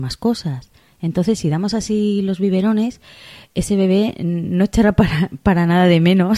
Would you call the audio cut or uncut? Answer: uncut